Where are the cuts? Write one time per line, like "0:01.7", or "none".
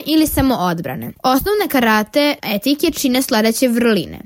0:01.1